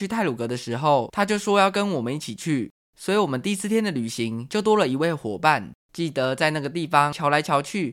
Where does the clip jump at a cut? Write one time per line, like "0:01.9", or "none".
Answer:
0:05.8